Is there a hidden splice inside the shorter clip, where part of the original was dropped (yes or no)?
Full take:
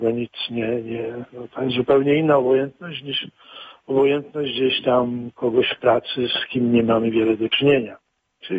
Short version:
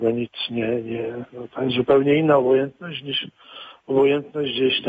no